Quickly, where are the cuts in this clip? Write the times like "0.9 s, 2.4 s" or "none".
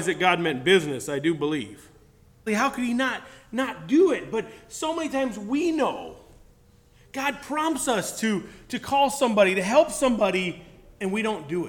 2.5 s